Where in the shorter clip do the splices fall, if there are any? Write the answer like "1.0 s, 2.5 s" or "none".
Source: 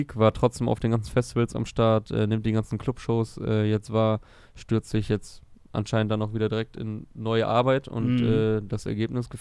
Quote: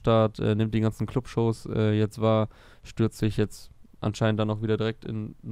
none